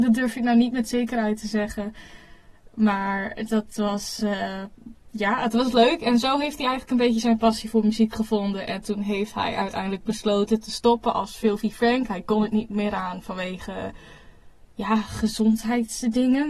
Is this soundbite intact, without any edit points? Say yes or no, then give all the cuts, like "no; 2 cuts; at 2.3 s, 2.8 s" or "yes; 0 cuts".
yes; 0 cuts